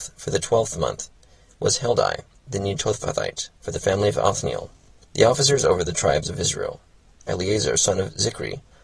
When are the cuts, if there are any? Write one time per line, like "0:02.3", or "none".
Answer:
0:03.6
0:05.0
0:07.2